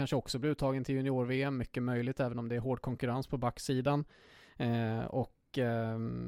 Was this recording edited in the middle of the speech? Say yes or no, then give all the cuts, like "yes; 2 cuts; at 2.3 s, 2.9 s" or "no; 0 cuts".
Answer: no; 0 cuts